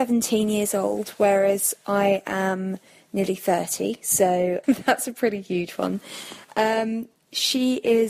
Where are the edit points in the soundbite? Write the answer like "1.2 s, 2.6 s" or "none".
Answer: 4.6 s